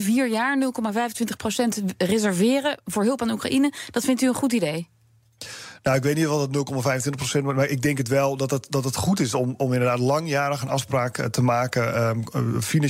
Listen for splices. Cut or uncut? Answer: uncut